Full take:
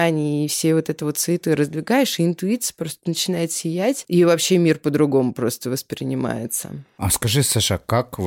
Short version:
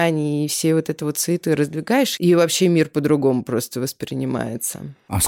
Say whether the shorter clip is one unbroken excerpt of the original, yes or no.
no